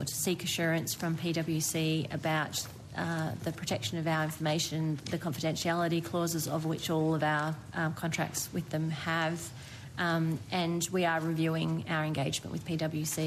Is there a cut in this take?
no; 0 cuts

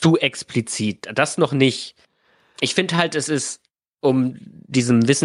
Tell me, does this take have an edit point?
no; 0 cuts

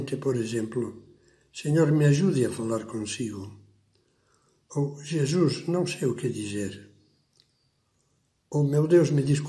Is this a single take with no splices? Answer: yes; 0 cuts

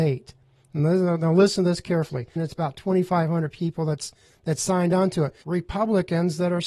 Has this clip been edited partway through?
yes; 2 cuts; at 2.4 s, 5.4 s

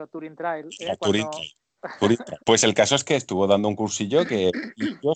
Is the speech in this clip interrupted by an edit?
yes; 1 cut; at 2.4 s

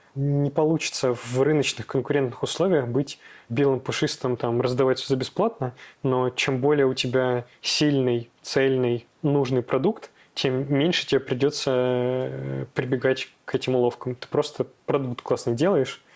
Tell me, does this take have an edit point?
no; 0 cuts

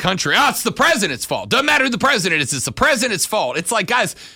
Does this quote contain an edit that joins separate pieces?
no; 0 cuts

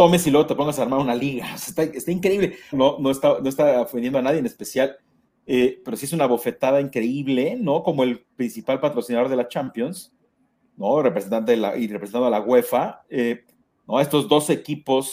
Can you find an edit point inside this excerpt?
yes; 1 cut; at 2.7 s

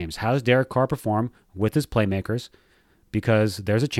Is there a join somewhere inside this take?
no; 0 cuts

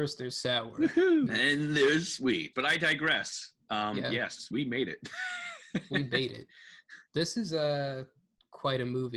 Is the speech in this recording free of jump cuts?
no; 3 cuts; at 1.3 s, 2.5 s, 4.5 s

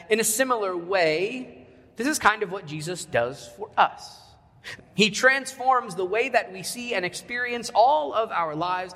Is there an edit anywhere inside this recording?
yes; 1 cut; at 4.8 s

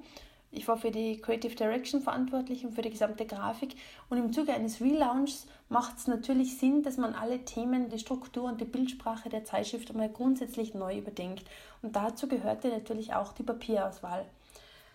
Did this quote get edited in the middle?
yes; 1 cut; at 7.9 s

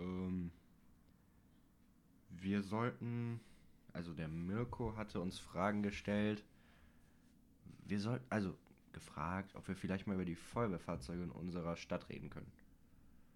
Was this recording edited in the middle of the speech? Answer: no; 0 cuts

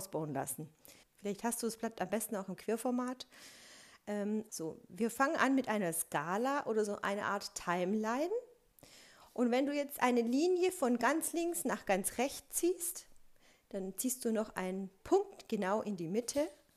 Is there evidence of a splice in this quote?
yes; 2 cuts; at 1.0 s, 4.5 s

